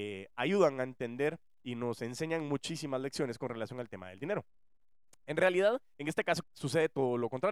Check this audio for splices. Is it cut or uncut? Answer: cut